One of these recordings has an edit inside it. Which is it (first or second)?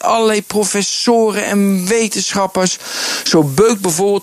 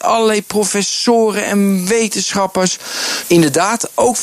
second